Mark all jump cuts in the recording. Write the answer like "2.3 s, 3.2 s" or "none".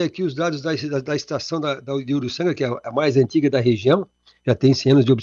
none